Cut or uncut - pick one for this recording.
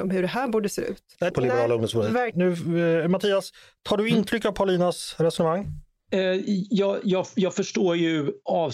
cut